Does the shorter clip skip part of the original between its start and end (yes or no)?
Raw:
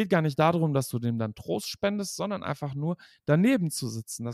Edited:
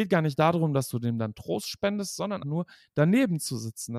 yes